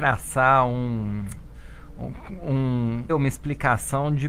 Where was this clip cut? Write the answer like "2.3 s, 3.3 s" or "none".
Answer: 3.1 s